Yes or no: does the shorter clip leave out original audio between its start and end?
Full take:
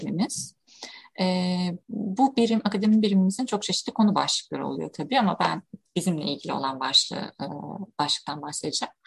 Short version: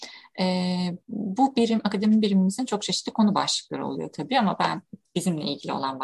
no